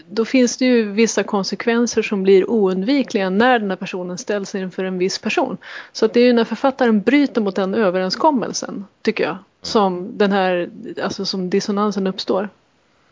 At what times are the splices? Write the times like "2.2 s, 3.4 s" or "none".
none